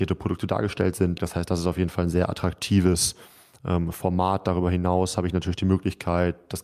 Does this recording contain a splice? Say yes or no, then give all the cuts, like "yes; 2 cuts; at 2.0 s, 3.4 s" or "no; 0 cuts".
yes; 1 cut; at 1.2 s